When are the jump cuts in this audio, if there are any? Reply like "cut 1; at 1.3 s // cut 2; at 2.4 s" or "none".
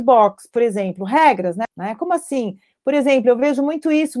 cut 1; at 1.6 s